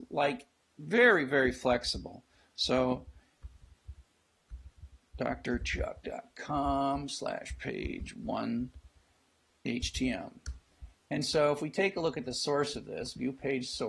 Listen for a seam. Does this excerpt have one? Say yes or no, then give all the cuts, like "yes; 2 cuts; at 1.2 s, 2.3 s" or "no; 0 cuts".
no; 0 cuts